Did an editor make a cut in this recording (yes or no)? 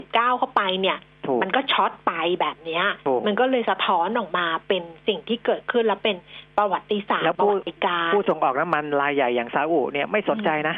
no